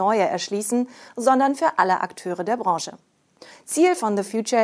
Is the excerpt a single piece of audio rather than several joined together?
no; 2 cuts; at 1.1 s, 3.5 s

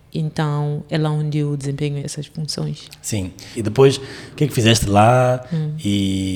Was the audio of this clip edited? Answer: yes; 2 cuts; at 2.0 s, 3.5 s

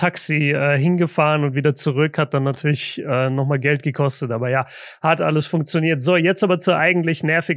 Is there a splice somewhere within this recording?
no; 0 cuts

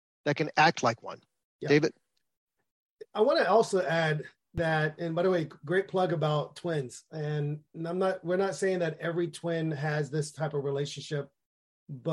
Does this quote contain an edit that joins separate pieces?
no; 0 cuts

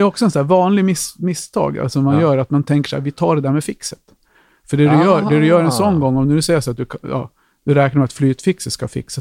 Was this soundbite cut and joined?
no; 0 cuts

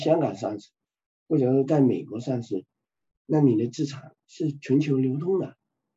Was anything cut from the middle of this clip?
no; 0 cuts

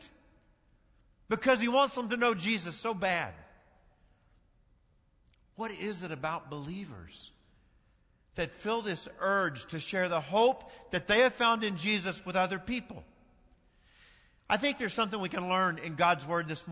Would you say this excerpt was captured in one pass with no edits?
yes; 0 cuts

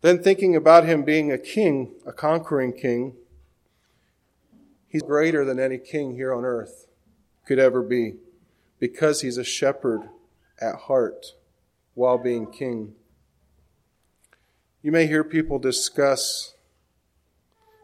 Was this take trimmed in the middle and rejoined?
yes; 1 cut; at 5.0 s

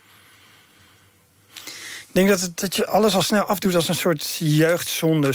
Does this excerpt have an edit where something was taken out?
yes; 1 cut; at 2.6 s

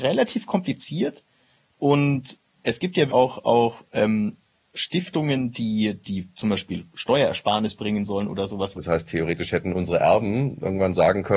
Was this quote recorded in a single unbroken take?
no; 2 cuts; at 3.1 s, 8.7 s

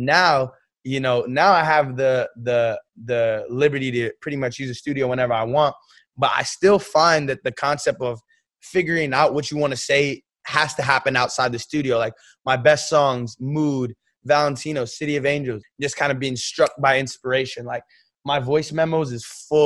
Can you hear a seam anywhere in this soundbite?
yes; 1 cut; at 15.6 s

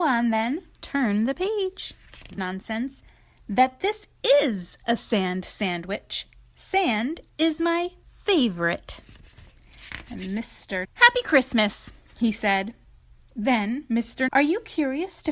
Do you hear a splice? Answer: yes; 3 cuts; at 2.4 s, 10.8 s, 14.3 s

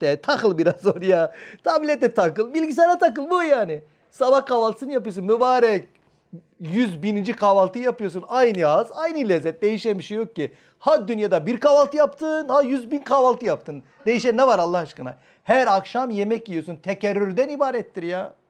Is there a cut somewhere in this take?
no; 0 cuts

